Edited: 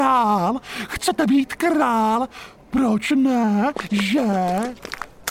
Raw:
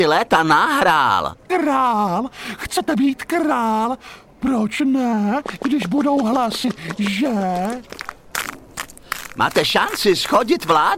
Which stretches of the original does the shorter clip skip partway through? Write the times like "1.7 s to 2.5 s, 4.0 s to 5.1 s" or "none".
5.6 s to 7.0 s